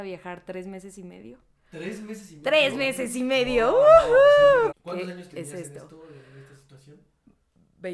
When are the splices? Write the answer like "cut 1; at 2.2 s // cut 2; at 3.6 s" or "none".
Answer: cut 1; at 4.7 s